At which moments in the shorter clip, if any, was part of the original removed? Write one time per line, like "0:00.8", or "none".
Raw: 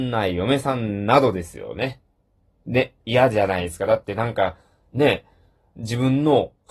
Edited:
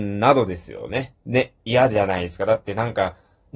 0:01.2